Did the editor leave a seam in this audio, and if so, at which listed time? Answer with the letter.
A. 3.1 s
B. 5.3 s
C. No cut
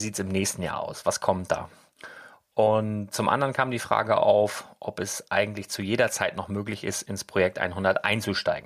A